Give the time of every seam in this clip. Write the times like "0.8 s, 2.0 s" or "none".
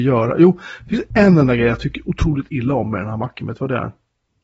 1.1 s